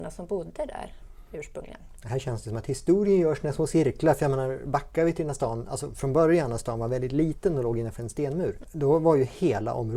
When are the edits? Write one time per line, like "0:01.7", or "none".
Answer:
0:08.6